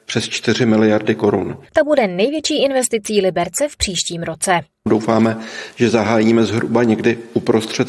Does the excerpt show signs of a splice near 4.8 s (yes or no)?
no